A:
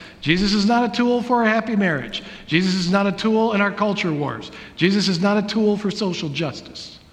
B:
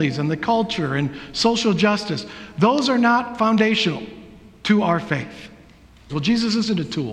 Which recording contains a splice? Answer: B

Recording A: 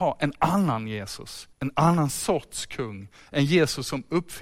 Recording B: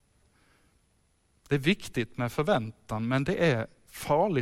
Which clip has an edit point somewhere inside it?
A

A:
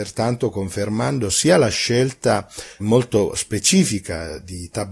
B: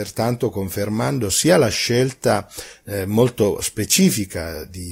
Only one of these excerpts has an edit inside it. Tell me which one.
A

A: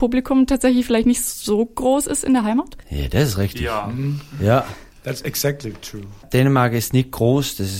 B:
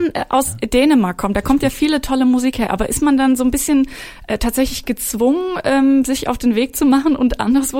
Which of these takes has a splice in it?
A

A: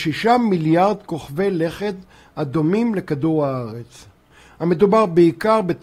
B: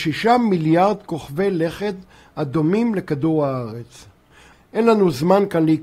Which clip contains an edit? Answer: B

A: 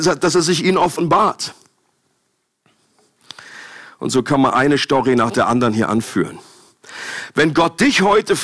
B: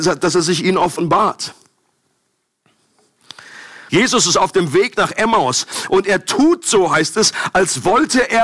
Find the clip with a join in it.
B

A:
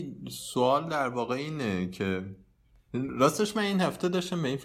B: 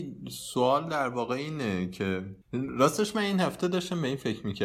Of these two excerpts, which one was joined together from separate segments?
B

